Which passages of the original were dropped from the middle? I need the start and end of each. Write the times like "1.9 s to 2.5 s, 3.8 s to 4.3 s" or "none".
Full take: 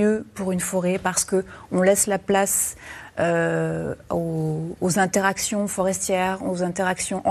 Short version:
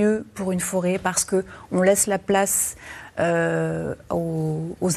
none